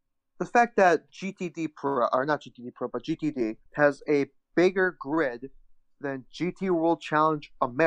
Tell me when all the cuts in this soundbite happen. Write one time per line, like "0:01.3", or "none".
0:03.7